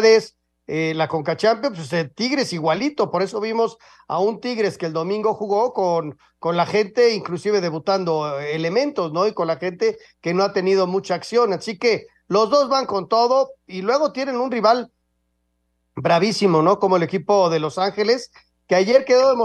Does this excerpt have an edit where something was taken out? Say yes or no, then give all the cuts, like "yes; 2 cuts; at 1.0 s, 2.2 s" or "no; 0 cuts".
no; 0 cuts